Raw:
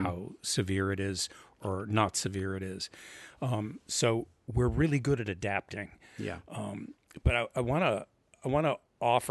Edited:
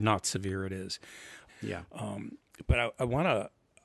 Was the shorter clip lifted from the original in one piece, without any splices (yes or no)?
no